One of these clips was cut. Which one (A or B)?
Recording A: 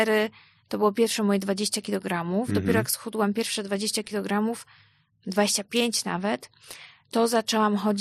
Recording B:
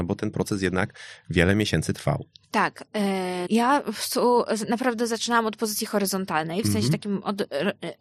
B